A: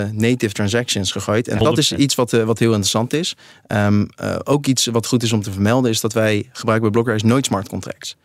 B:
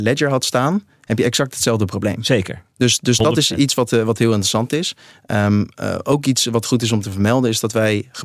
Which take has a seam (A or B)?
A